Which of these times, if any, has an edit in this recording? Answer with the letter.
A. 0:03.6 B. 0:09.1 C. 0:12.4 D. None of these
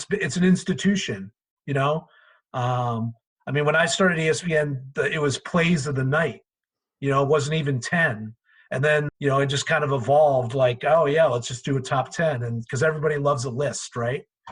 B